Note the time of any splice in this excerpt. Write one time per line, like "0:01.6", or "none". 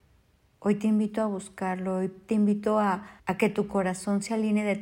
0:03.2